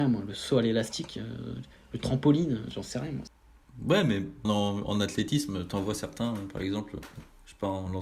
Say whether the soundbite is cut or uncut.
cut